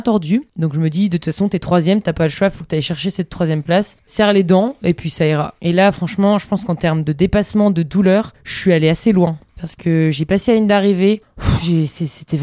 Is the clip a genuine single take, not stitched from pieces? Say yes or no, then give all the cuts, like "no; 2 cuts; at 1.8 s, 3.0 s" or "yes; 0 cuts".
no; 1 cut; at 5.6 s